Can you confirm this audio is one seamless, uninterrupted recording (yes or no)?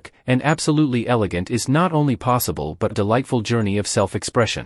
no